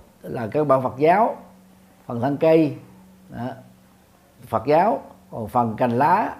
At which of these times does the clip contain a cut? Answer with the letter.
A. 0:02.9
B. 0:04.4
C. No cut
B